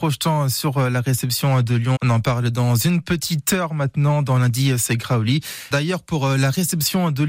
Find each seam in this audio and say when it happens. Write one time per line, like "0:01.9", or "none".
0:02.0
0:05.7